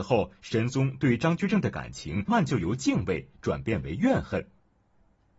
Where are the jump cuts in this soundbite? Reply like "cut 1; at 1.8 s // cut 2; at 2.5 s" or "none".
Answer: cut 1; at 2.3 s